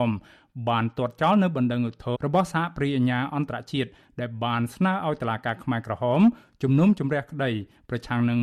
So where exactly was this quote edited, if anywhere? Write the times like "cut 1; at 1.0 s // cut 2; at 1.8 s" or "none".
cut 1; at 2.1 s